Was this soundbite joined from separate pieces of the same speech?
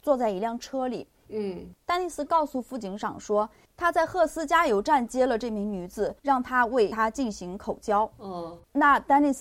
yes; 2 cuts; at 1.3 s, 6.2 s

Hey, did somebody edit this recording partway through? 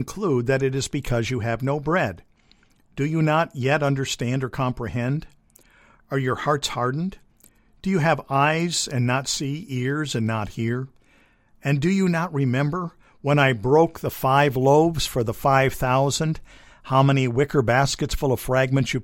no; 0 cuts

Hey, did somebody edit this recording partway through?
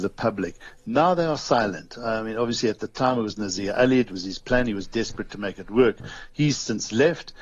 no; 0 cuts

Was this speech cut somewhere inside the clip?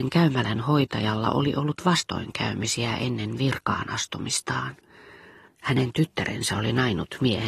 yes; 1 cut; at 5.5 s

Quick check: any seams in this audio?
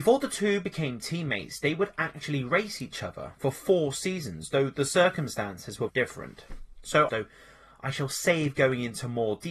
yes; 2 cuts; at 5.9 s, 7.1 s

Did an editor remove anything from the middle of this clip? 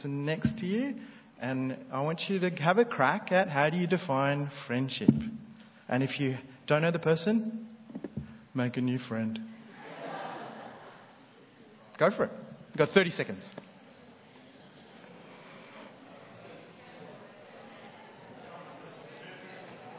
no; 0 cuts

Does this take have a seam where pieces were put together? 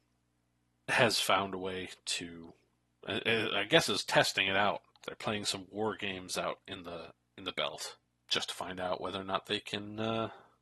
no; 0 cuts

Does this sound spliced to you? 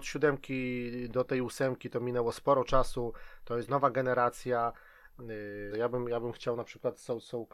yes; 1 cut; at 5.7 s

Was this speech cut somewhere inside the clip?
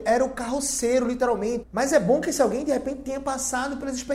yes; 1 cut; at 1.6 s

